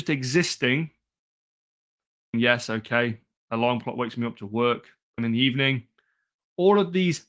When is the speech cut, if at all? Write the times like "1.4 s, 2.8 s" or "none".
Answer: 2.3 s, 5.2 s